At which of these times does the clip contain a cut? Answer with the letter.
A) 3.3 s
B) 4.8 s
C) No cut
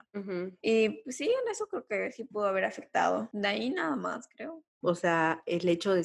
B